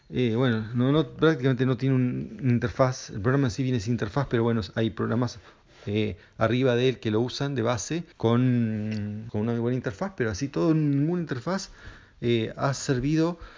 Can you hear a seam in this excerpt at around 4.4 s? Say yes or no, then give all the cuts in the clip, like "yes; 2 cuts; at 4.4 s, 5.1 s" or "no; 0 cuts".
no; 2 cuts; at 8.1 s, 9.3 s